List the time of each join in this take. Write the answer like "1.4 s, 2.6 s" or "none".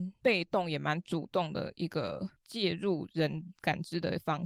none